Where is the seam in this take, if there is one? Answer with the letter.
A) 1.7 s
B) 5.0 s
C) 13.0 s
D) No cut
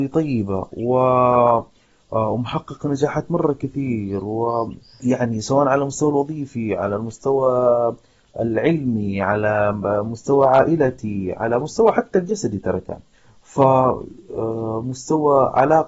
B